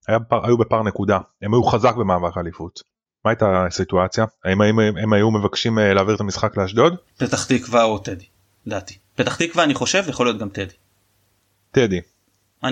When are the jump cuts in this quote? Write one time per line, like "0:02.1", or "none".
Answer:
none